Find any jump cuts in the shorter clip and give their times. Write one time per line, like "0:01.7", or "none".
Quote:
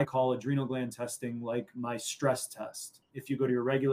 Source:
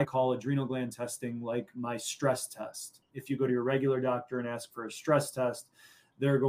none